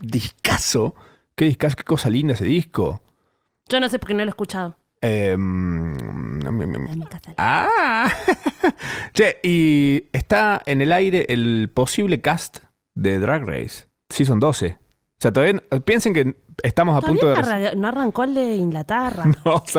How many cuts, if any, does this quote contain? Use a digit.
1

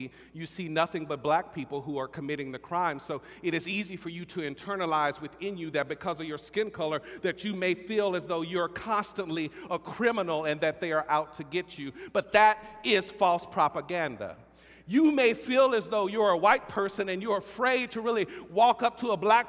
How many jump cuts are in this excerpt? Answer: 0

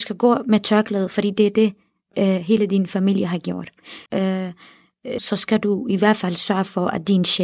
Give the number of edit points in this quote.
2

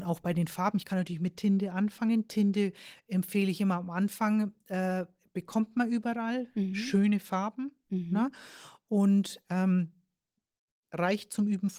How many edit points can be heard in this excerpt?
0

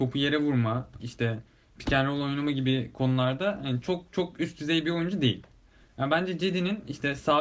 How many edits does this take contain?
1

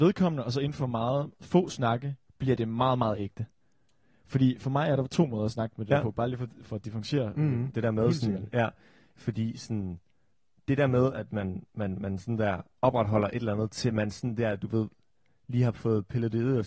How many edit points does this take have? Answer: 1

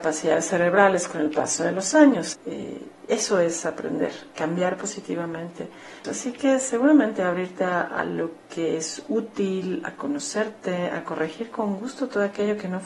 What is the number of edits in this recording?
2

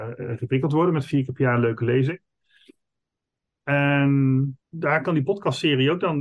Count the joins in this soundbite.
1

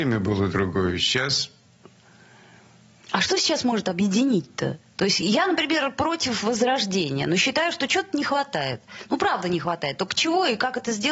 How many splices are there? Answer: 0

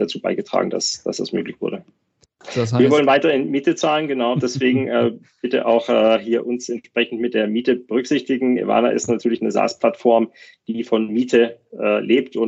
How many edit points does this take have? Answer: 1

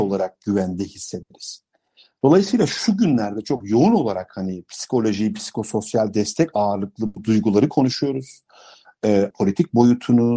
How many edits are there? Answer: 1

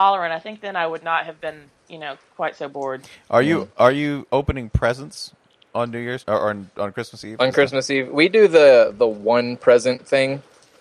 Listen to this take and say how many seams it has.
1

